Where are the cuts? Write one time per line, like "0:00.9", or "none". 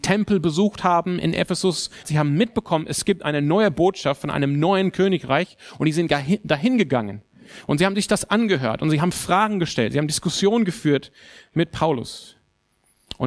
0:02.0